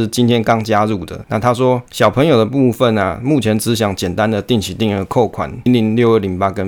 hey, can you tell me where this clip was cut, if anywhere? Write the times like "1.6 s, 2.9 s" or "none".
5.7 s